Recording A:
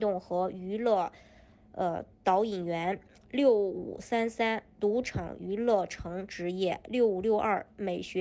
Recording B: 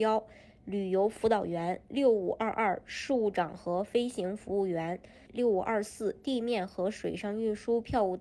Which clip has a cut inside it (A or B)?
B